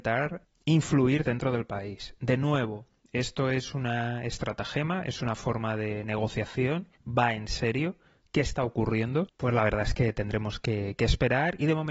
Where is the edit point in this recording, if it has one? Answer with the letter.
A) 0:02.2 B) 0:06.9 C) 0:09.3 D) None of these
B